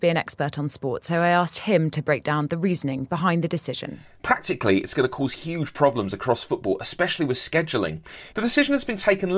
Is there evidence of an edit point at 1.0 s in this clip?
no; 2 cuts; at 4.1 s, 8.3 s

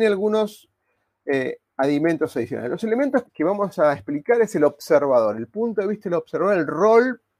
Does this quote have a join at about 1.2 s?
no; 1 cut; at 3.3 s

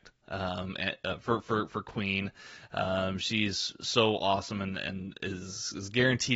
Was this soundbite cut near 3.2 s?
no; 0 cuts

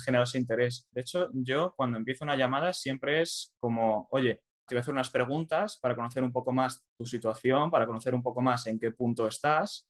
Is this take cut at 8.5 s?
no; 2 cuts; at 0.9 s, 4.7 s

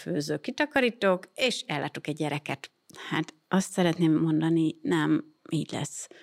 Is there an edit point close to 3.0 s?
no; 0 cuts

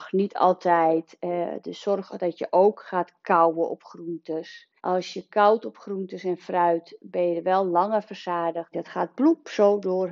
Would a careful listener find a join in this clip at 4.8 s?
yes; 2 cuts; at 4.8 s, 8.7 s

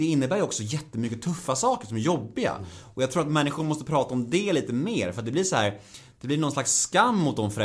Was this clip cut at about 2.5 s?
no; 0 cuts

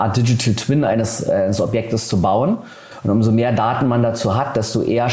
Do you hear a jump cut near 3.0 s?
no; 0 cuts

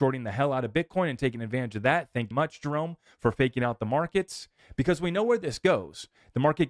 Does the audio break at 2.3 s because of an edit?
yes; 1 cut; at 2.3 s

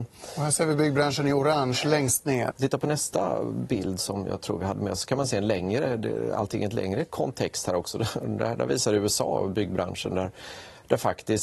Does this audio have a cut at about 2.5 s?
yes; 1 cut; at 2.5 s

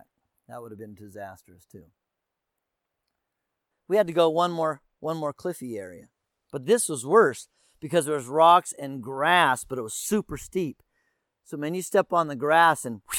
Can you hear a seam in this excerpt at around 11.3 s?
no; 1 cut; at 3.7 s

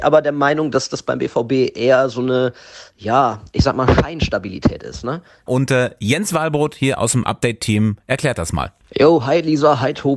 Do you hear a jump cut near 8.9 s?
no; 1 cut; at 5.5 s

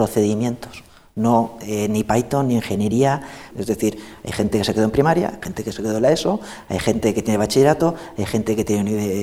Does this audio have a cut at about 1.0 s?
no; 1 cut; at 3.5 s

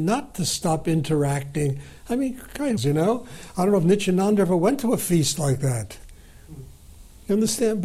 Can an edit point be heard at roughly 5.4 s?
no; 1 cut; at 2.8 s

